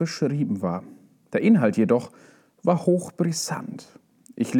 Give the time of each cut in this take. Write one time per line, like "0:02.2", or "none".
none